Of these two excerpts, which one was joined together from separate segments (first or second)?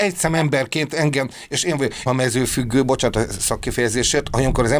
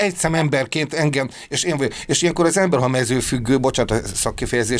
first